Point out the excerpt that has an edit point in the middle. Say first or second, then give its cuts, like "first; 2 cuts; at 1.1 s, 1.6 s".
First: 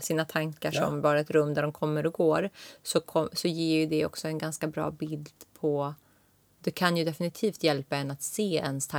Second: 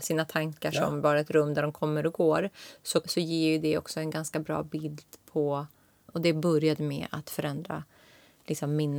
second; 2 cuts; at 3.0 s, 6.1 s